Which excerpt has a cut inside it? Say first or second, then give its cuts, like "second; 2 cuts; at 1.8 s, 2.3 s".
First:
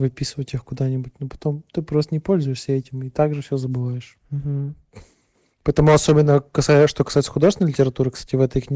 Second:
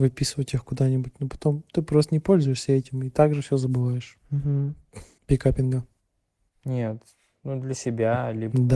second; 1 cut; at 5.2 s